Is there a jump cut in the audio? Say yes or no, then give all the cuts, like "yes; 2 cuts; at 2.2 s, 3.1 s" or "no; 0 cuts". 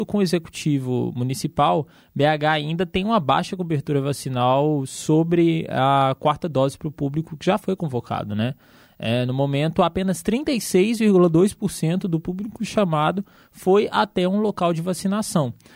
no; 0 cuts